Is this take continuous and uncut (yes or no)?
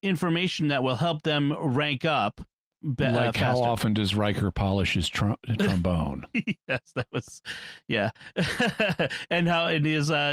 yes